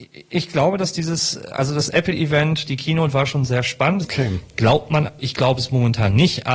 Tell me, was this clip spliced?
yes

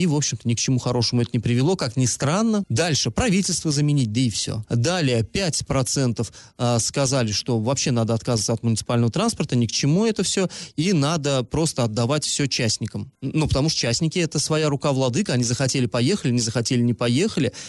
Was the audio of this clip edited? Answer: yes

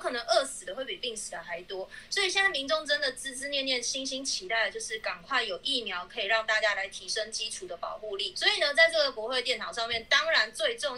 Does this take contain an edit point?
no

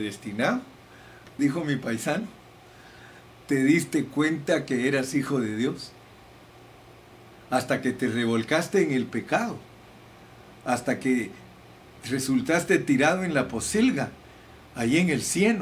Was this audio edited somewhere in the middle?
yes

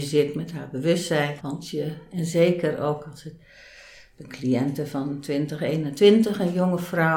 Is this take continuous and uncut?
no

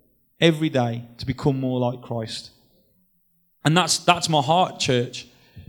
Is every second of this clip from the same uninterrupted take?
yes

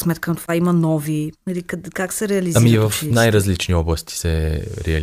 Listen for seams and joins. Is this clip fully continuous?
yes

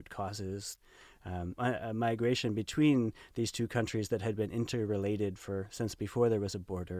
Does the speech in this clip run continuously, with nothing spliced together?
no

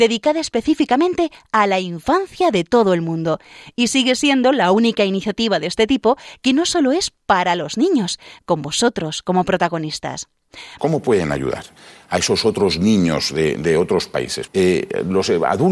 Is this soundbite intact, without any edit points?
no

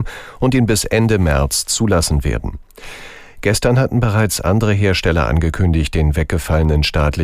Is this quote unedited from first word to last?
yes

